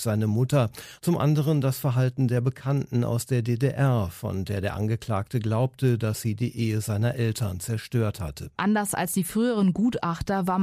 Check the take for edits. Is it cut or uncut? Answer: cut